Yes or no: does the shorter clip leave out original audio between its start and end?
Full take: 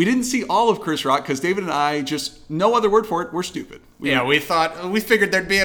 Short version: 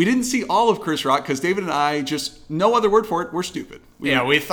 no